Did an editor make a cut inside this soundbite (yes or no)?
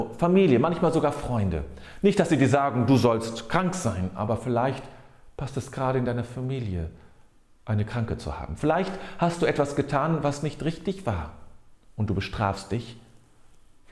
no